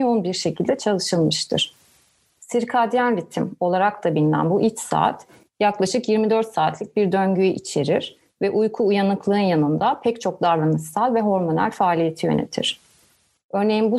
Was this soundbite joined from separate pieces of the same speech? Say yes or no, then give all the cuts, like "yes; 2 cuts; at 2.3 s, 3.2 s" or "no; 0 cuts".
yes; 1 cut; at 2.4 s